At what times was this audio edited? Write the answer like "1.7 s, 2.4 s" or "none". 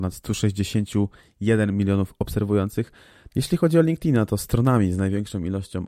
3.3 s